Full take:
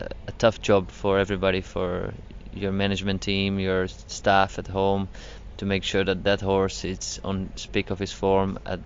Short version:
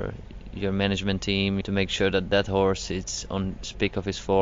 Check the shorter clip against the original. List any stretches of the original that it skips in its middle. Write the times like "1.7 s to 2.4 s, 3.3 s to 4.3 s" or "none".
3.6 s to 5.5 s

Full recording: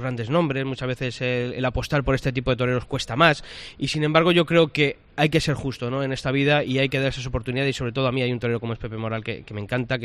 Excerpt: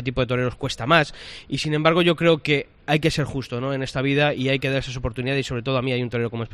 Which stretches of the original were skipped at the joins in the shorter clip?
none

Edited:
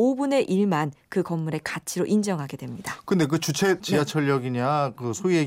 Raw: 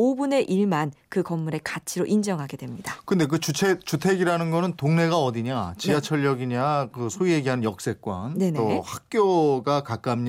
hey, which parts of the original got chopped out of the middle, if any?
3.8 s to 5.8 s

